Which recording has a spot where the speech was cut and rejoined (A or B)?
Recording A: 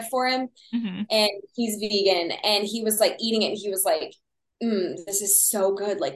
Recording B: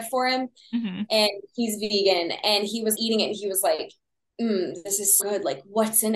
B